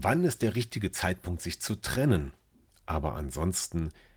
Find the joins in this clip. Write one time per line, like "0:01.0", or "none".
0:02.7